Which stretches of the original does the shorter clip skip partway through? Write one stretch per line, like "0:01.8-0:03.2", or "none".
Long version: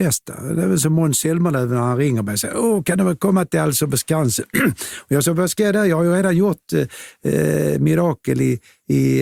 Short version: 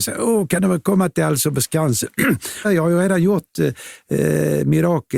0:05.0-0:05.8